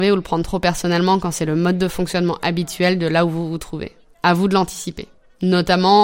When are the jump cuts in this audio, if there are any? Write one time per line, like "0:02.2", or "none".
none